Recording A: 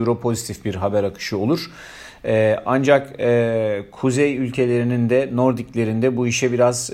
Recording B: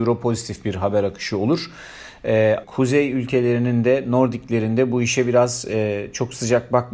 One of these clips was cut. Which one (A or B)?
B